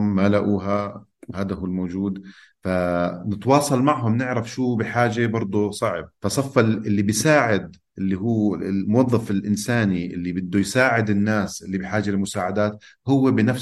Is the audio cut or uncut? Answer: cut